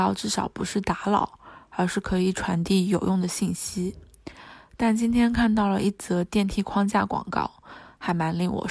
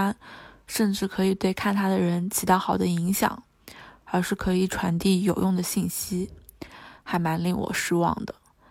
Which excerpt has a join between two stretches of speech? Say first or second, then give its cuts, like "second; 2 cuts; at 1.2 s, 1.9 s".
second; 2 cuts; at 4.0 s, 7.0 s